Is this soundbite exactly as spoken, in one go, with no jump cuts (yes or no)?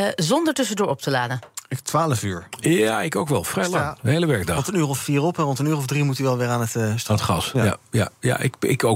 yes